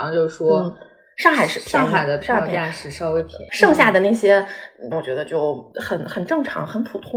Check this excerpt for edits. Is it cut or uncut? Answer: cut